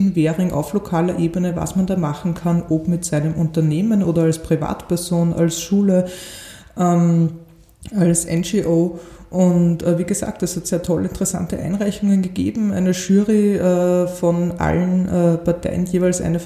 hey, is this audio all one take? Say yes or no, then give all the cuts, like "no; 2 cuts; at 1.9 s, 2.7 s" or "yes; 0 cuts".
yes; 0 cuts